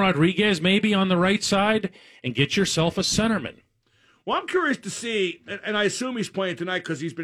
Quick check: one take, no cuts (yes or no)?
yes